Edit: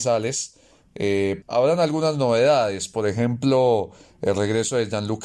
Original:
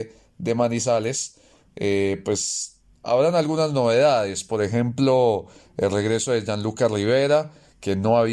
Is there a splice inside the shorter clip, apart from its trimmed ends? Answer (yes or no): yes